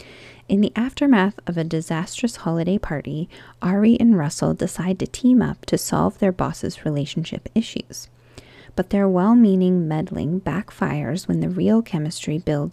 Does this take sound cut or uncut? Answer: cut